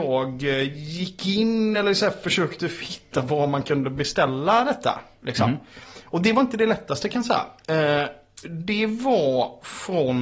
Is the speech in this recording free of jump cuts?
yes; 0 cuts

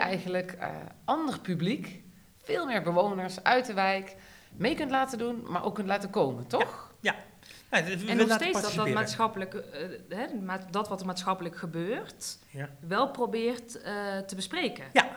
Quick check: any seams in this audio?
no; 0 cuts

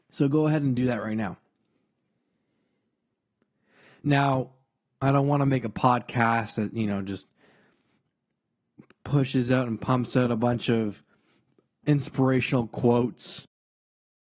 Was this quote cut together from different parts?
yes; 1 cut; at 11.8 s

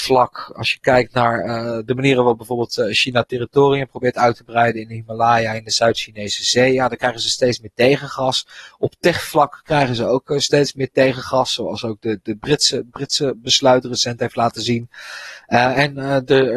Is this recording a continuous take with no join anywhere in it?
yes; 0 cuts

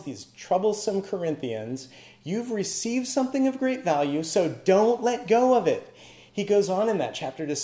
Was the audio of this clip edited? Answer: no; 0 cuts

